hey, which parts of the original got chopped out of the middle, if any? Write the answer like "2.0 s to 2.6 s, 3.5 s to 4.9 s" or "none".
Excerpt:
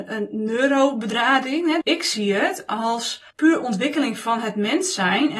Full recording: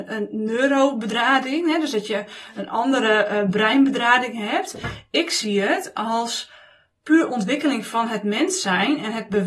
1.8 s to 5.1 s, 6.6 s to 7.0 s